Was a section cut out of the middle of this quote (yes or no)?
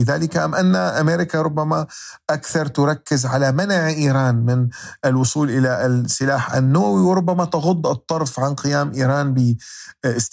no